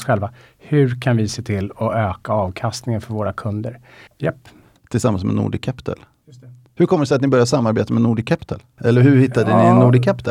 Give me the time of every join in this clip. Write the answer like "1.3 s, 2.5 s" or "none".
4.1 s, 8.8 s